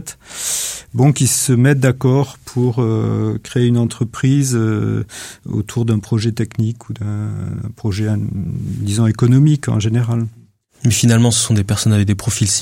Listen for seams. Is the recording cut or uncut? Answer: uncut